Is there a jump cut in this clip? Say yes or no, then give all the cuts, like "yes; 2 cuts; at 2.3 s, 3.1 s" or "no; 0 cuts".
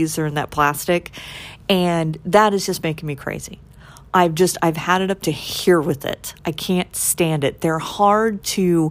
no; 0 cuts